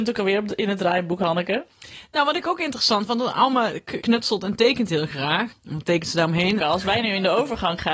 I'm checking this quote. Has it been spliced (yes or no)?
yes